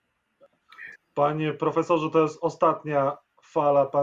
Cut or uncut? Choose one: cut